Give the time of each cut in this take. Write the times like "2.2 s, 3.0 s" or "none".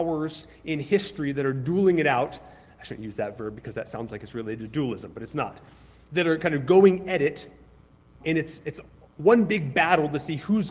8.2 s

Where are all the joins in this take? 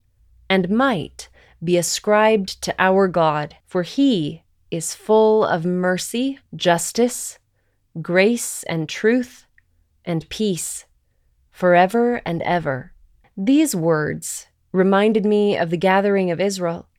3.6 s, 6.5 s, 13.2 s

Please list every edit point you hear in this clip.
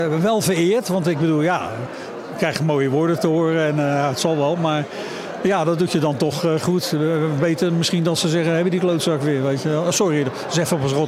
none

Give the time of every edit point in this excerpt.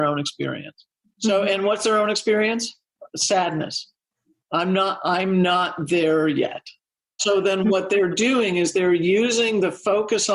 none

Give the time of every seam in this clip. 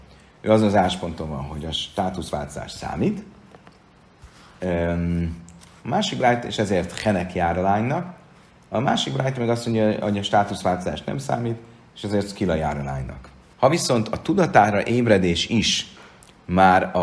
13.5 s

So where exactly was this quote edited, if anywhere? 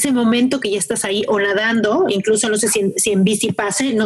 none

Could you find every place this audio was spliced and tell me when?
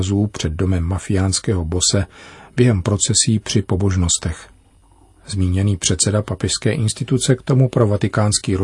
none

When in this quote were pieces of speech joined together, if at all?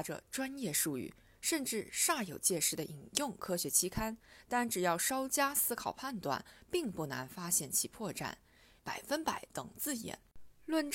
8.8 s

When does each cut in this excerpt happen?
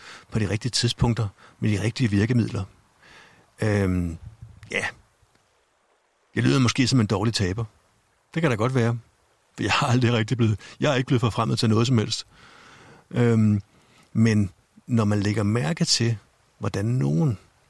none

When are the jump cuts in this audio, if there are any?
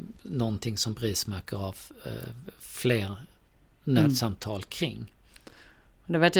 none

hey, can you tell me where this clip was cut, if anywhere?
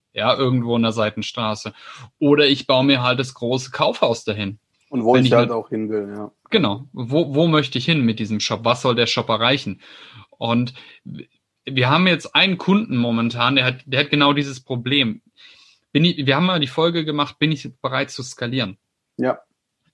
4.7 s

